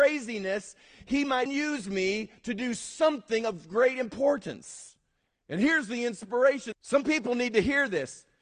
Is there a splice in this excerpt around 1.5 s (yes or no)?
yes